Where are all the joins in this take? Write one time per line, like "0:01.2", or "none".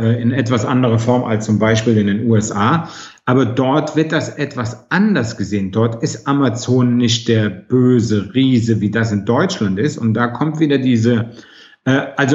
none